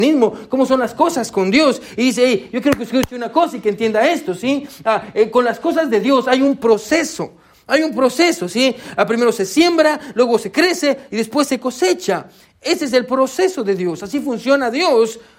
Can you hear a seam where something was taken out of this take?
no; 0 cuts

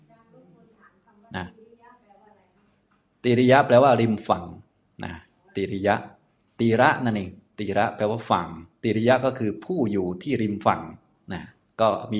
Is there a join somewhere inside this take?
no; 0 cuts

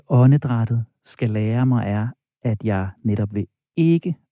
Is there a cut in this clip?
no; 0 cuts

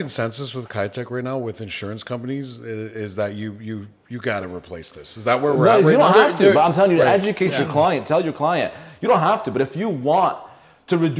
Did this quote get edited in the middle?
no; 0 cuts

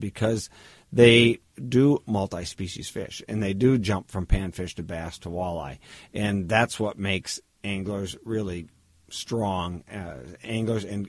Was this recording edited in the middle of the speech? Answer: no; 0 cuts

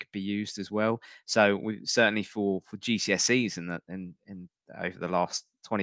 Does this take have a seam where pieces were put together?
no; 0 cuts

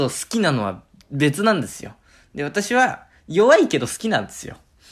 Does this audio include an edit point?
no; 0 cuts

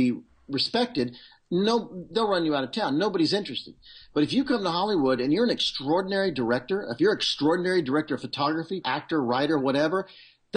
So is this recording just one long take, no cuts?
no; 1 cut; at 8.8 s

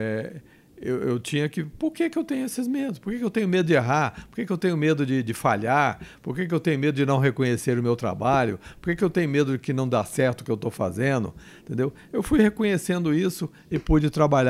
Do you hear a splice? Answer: no; 0 cuts

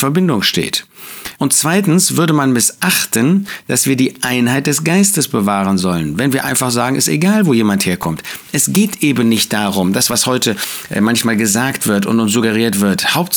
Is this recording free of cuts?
no; 1 cut; at 1.3 s

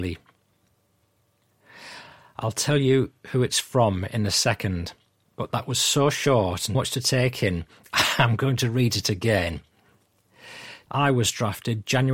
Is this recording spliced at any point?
yes; 2 cuts; at 6.7 s, 10.9 s

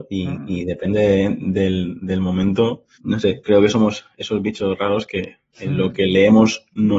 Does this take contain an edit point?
yes; 1 cut; at 2.9 s

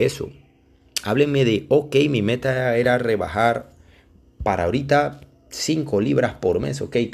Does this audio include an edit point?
no; 0 cuts

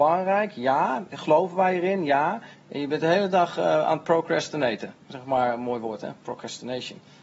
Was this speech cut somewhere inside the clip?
yes; 1 cut; at 2.5 s

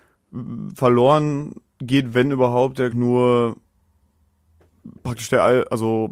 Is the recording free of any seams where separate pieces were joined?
no; 2 cuts; at 1.7 s, 2.9 s

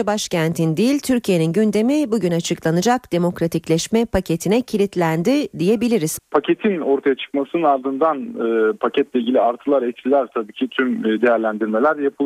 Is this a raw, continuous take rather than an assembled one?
no; 1 cut; at 6.2 s

